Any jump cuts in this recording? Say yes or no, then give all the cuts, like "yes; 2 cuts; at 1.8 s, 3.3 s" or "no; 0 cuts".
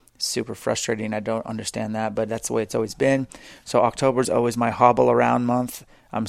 no; 0 cuts